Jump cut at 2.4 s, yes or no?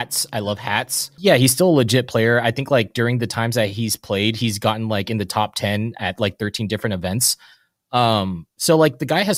no